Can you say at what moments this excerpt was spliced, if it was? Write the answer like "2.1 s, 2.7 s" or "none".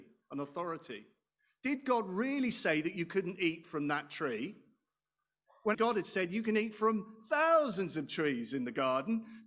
5.7 s